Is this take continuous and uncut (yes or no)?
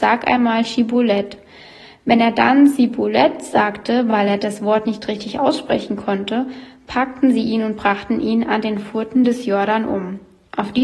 yes